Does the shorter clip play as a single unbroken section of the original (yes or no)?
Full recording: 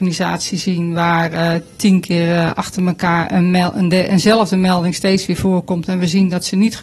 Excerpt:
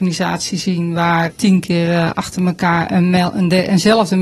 no